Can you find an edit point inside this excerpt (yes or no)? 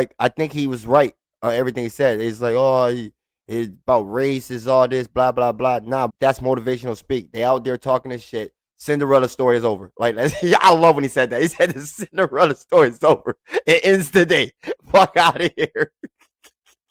yes